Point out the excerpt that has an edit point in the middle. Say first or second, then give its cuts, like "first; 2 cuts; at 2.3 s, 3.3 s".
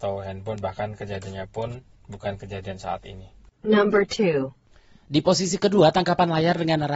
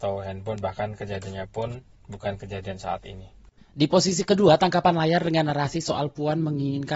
second; 1 cut; at 3.6 s